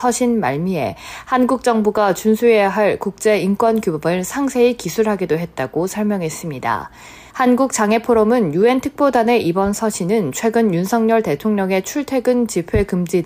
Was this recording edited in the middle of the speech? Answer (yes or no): yes